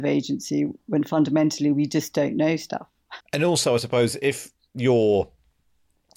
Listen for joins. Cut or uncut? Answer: cut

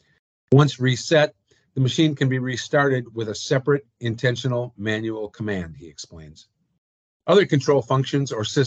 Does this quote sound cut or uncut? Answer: uncut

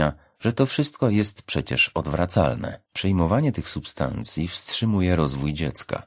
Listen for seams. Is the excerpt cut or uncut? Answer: cut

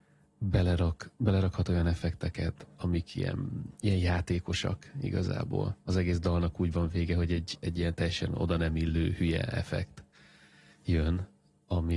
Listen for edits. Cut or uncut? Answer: uncut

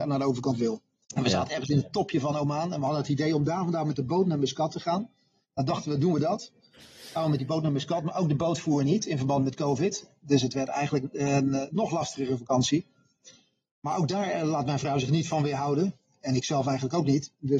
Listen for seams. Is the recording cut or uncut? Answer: cut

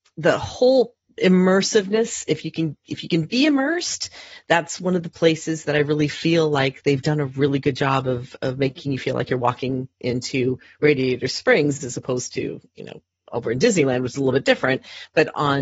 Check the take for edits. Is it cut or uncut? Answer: uncut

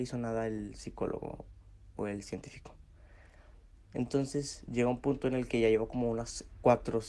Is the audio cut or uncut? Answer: uncut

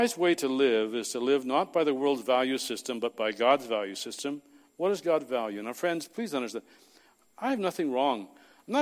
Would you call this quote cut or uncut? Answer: uncut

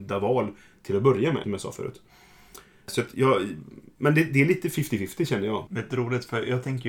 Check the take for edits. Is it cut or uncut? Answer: cut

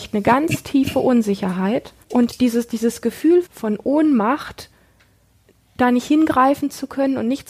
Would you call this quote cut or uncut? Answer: cut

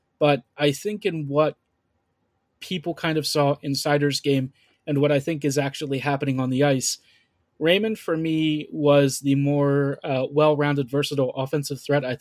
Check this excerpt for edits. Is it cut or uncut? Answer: uncut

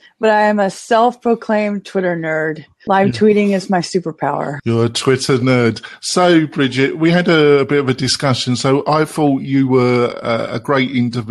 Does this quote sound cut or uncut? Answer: uncut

